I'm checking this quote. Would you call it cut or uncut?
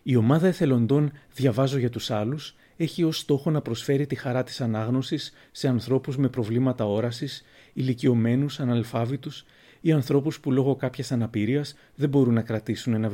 uncut